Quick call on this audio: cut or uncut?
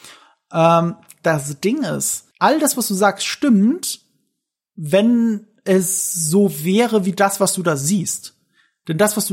cut